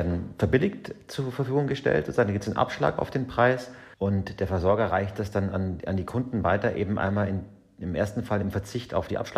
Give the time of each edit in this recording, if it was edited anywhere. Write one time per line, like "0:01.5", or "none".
0:03.9